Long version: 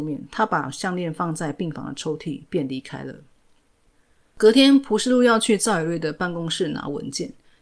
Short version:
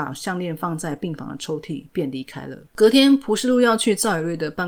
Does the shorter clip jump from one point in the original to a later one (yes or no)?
yes